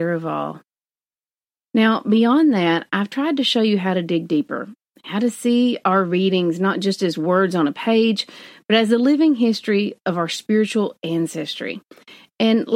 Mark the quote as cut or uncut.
uncut